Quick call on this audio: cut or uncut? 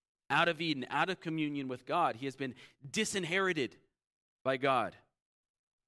uncut